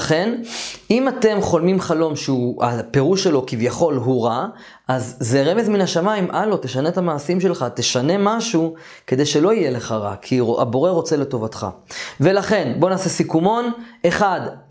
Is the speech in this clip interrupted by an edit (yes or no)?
no